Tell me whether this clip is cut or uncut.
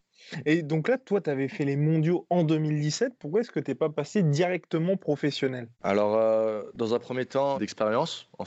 cut